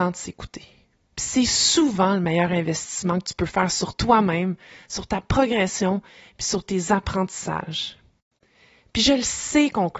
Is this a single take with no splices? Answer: no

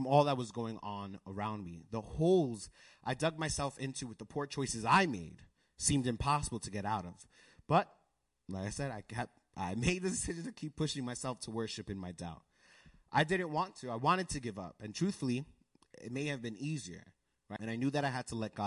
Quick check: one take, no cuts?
no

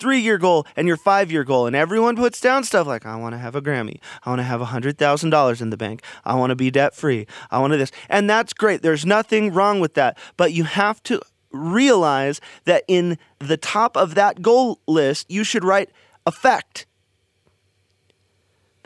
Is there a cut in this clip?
yes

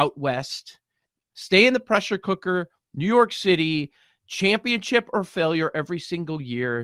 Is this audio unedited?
no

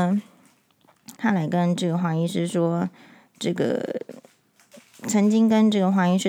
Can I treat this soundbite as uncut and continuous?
no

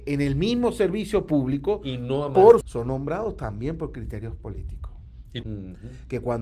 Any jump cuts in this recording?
yes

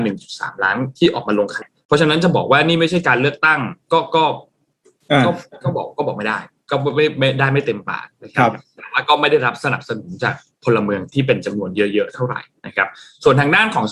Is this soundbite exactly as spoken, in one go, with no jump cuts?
no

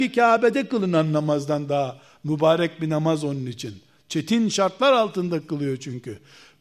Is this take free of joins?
yes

